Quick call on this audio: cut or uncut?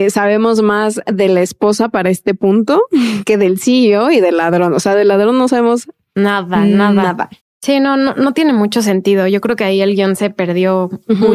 cut